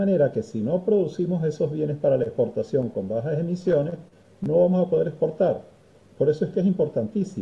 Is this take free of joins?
yes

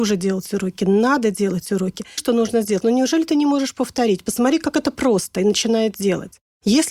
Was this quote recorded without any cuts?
no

